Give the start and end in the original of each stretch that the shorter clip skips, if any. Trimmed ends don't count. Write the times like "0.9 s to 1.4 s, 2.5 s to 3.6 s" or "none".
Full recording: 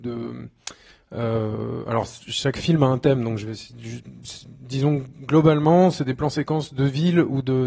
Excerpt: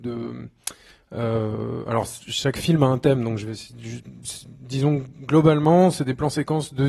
none

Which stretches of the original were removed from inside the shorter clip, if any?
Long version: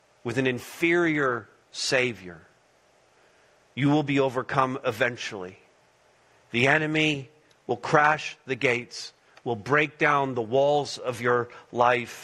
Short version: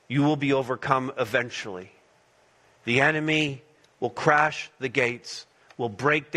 none

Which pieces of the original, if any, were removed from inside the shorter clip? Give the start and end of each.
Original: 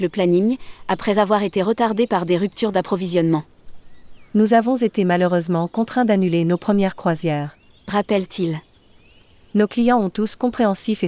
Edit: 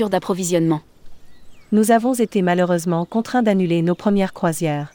none

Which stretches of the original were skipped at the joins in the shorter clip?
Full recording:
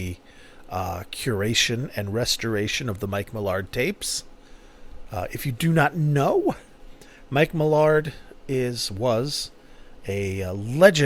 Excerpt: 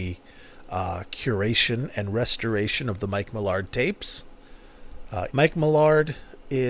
5.3 s to 7.3 s

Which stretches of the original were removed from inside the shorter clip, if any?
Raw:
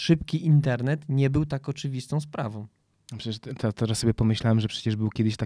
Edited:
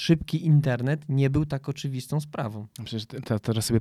2.7 s to 3.1 s

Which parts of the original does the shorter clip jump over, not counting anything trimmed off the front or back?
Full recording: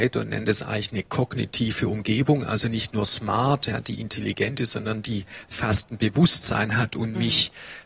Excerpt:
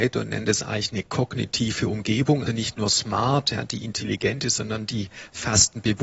2.5 s to 2.6 s

